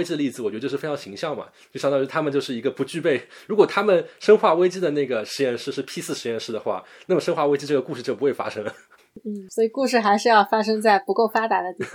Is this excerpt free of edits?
yes; 0 cuts

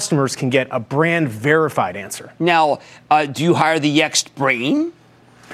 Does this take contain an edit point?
no; 0 cuts

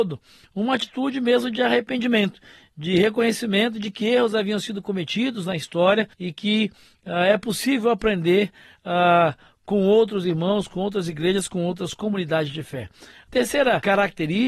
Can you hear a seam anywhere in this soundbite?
yes; 1 cut; at 6.1 s

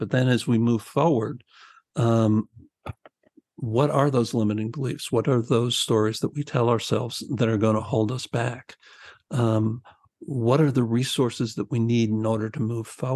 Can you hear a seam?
no; 0 cuts

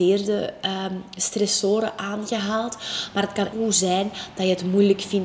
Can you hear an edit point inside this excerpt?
yes; 1 cut; at 3.5 s

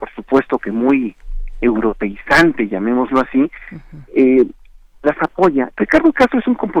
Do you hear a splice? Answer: yes; 1 cut; at 5.7 s

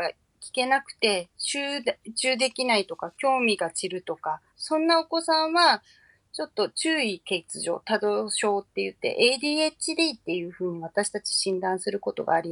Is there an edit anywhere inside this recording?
yes; 1 cut; at 4.5 s

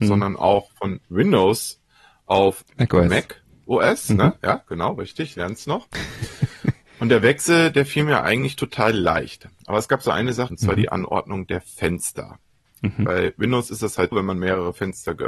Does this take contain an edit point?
yes; 2 cuts; at 10.5 s, 14.1 s

